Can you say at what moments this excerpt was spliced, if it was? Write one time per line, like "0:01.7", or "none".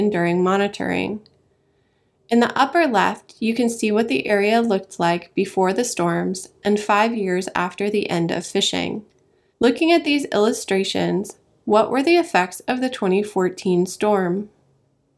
0:09.5

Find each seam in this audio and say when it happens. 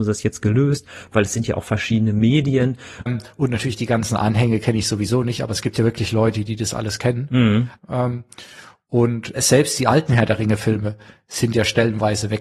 0:03.1
0:07.8
0:09.3

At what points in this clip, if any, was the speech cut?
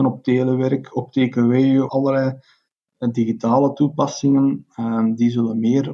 0:01.9

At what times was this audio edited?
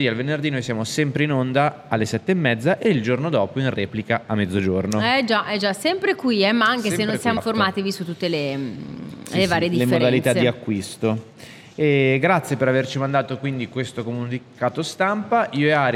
0:07.4

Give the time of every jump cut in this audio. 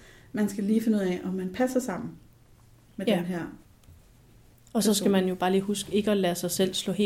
none

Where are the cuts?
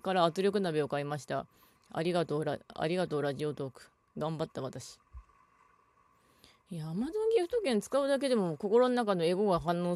none

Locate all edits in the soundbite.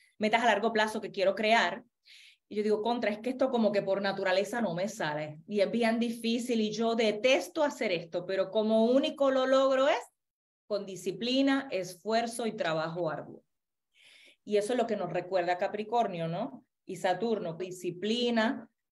0:17.6

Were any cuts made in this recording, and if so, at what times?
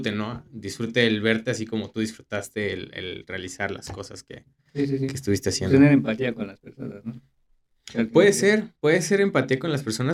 none

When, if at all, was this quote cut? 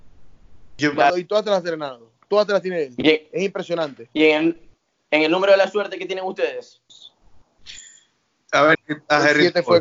0:01.1
0:08.7

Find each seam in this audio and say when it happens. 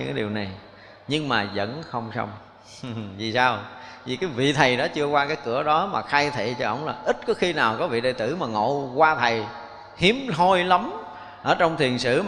none

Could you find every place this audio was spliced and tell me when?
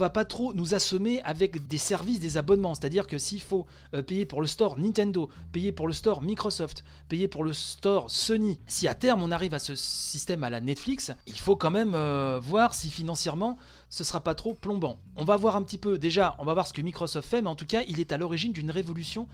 0:01.7

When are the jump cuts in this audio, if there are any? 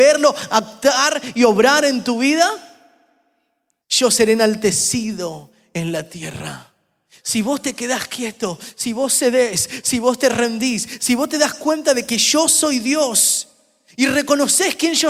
0:03.8

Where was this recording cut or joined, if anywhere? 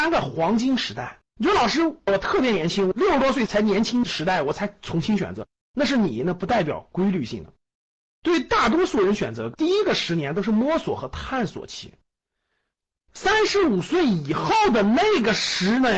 0:01.3

